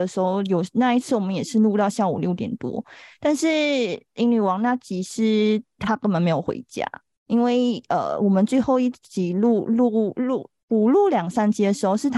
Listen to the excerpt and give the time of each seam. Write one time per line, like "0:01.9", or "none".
none